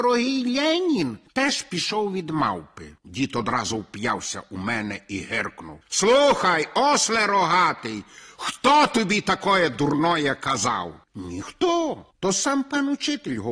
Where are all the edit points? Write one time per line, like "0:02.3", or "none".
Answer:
none